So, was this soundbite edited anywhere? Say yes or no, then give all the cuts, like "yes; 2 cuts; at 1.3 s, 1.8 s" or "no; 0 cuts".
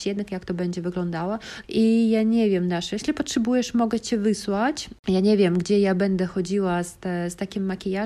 yes; 1 cut; at 1.6 s